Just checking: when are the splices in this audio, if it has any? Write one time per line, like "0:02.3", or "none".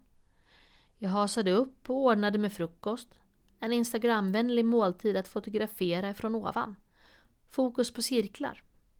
none